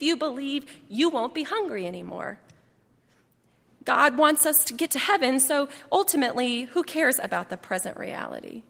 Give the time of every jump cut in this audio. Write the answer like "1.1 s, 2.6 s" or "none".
none